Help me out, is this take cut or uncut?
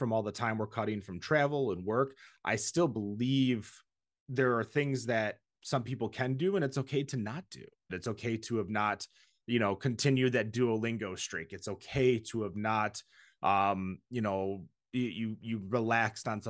cut